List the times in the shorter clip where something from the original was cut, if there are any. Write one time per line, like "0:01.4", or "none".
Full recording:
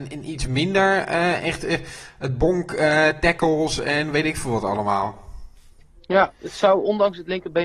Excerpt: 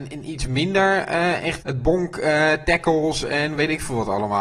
0:01.6